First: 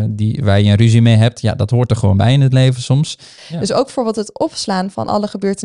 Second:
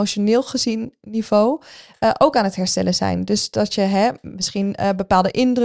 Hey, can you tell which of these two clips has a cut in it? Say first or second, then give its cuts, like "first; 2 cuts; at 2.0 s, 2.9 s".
first; 1 cut; at 3.4 s